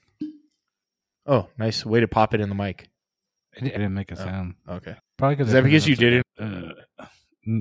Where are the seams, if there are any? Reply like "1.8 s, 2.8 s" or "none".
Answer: 3.8 s, 5.0 s, 6.2 s

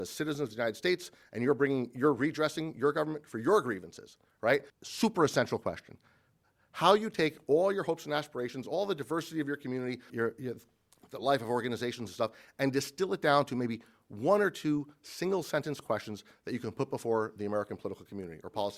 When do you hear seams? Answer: 4.7 s, 10.1 s

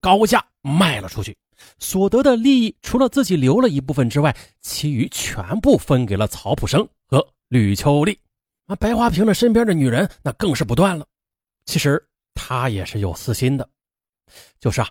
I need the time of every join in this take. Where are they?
8.6 s, 11.5 s

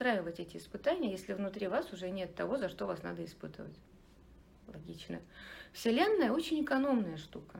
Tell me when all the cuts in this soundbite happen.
4.5 s

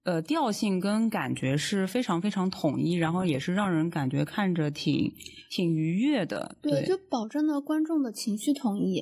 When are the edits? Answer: none

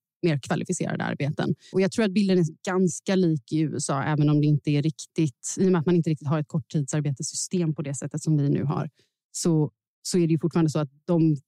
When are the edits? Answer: 1.7 s

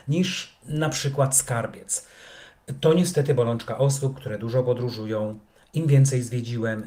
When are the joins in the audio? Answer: none

